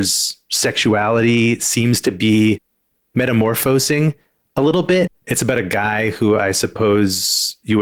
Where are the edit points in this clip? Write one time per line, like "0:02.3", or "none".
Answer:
0:05.1